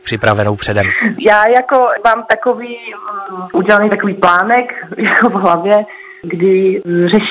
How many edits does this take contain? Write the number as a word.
one